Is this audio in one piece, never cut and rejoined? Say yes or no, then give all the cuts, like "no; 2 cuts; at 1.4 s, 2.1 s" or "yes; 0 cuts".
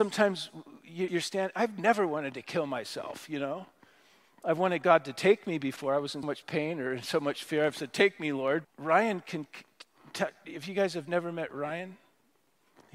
no; 3 cuts; at 1.1 s, 6.2 s, 8.6 s